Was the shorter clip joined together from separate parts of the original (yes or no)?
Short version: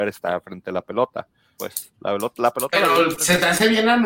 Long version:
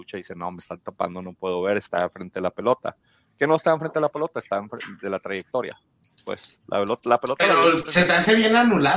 yes